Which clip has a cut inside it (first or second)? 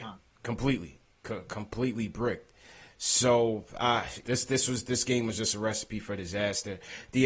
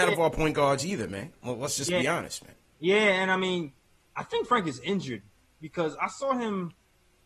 first